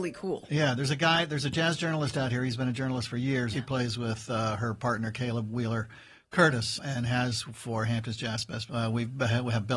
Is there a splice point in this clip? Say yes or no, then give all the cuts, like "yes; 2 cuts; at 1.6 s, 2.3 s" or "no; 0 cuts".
yes; 3 cuts; at 3.5 s, 6.8 s, 8.7 s